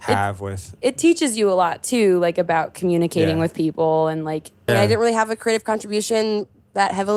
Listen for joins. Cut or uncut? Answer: cut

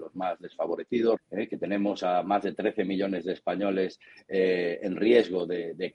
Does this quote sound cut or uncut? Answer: cut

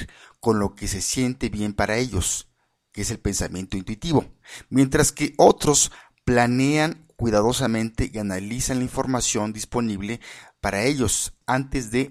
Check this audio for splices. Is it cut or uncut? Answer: uncut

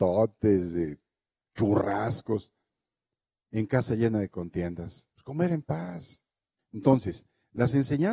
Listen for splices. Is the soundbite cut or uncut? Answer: cut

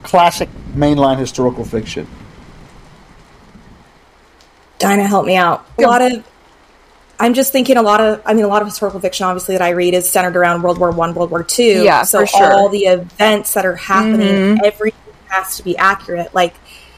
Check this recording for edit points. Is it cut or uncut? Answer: cut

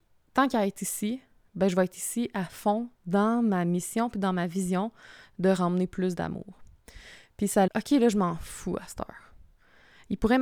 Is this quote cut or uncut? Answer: cut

